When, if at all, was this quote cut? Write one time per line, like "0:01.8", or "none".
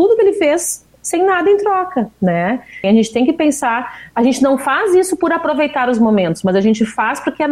0:02.8